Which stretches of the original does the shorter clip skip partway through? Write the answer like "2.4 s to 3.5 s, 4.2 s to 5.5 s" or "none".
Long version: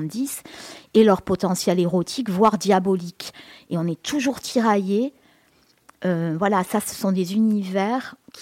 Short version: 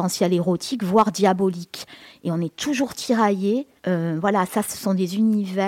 5.2 s to 5.9 s